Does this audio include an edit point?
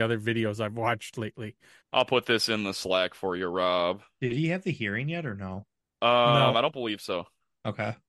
yes; 1 cut; at 1.8 s

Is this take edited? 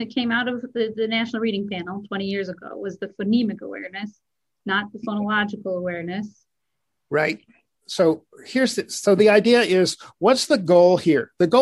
yes; 1 cut; at 7.8 s

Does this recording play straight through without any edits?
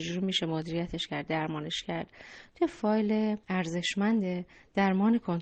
no; 1 cut; at 3.4 s

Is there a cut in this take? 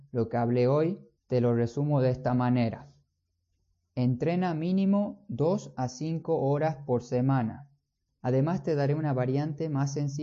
yes; 2 cuts; at 1.2 s, 8.1 s

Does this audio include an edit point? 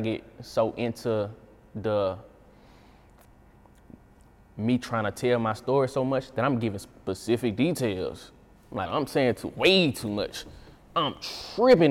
yes; 1 cut; at 8.8 s

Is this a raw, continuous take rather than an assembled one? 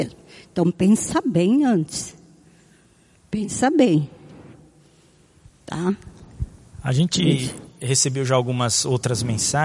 yes; 0 cuts

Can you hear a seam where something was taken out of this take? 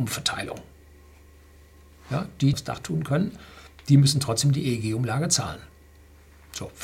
yes; 1 cut; at 2.5 s

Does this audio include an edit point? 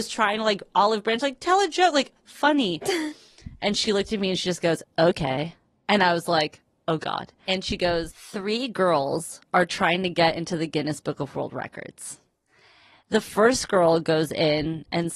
no; 0 cuts

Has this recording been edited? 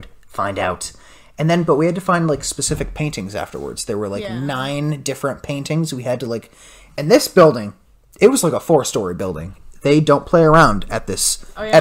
no; 0 cuts

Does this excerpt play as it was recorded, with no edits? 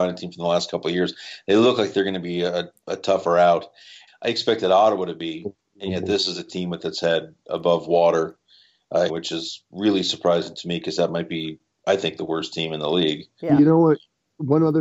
no; 2 cuts; at 4.1 s, 9.1 s

